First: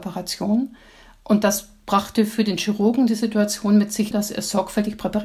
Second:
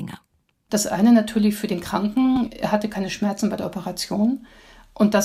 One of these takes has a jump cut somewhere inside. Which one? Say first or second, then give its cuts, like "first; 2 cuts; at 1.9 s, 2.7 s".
first; 1 cut; at 4.1 s